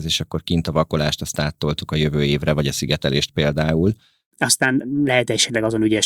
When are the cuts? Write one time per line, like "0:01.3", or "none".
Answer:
0:04.3